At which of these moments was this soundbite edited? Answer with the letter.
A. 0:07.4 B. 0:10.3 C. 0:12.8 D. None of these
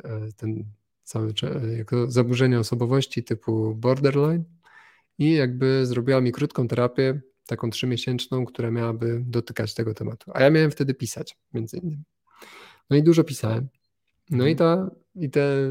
D